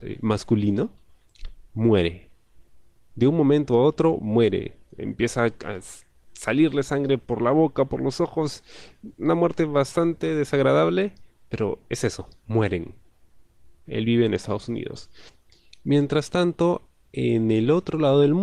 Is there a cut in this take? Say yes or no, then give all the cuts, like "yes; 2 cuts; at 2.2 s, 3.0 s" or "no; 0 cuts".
yes; 1 cut; at 13.9 s